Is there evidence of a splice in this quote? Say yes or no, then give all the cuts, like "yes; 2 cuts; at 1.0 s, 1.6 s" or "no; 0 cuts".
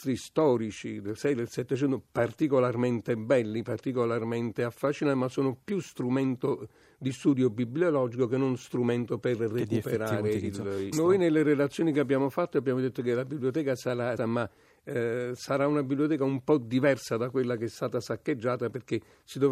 yes; 2 cuts; at 10.9 s, 14.2 s